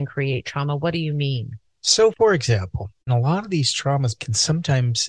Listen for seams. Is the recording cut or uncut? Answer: uncut